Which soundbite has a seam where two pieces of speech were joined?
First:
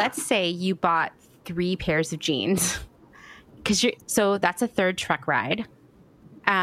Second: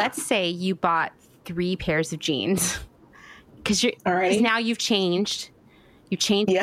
first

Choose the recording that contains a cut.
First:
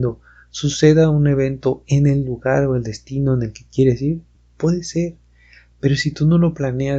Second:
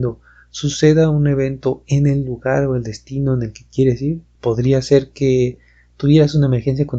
second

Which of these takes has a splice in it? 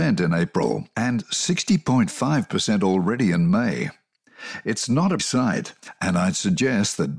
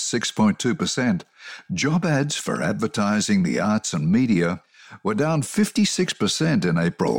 first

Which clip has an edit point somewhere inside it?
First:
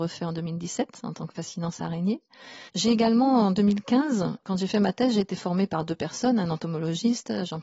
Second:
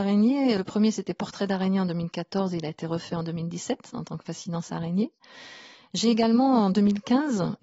first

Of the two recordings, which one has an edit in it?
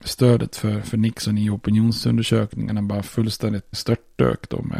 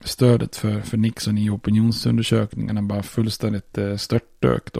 first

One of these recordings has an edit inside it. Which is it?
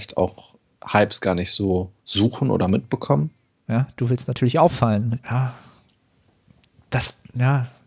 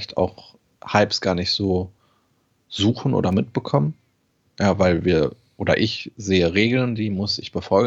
first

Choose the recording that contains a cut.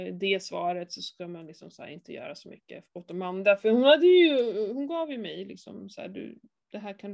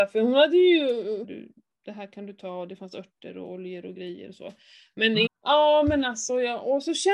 second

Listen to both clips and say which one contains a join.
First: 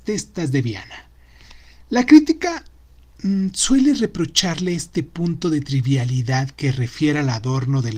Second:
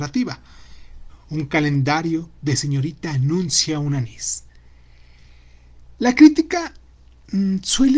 second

